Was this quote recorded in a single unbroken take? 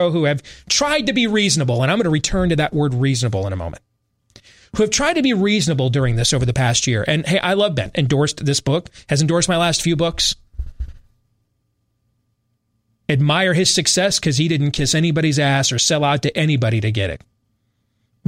yes; 0 cuts

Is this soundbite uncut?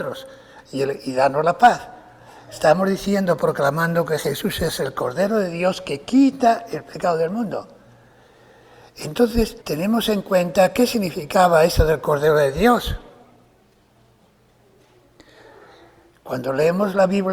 no; 1 cut; at 9.6 s

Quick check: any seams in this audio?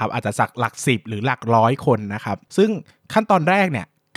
no; 0 cuts

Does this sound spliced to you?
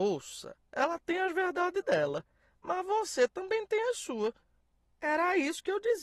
no; 0 cuts

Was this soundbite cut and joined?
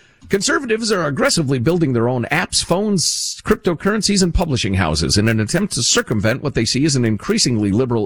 no; 0 cuts

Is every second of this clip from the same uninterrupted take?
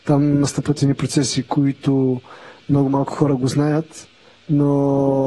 yes; 0 cuts

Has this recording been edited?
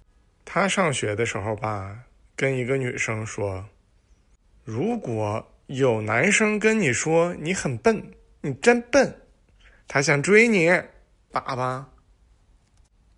yes; 2 cuts; at 9.8 s, 11.3 s

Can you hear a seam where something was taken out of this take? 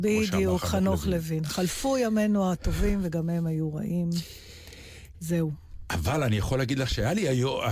no; 0 cuts

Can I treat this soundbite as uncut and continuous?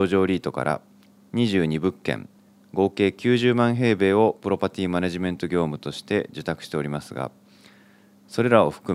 yes; 0 cuts

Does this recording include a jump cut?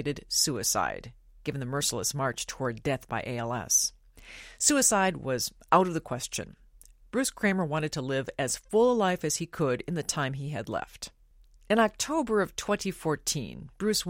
no; 0 cuts

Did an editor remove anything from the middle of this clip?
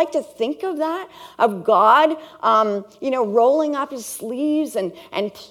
no; 0 cuts

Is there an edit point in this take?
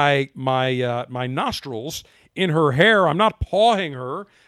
no; 0 cuts

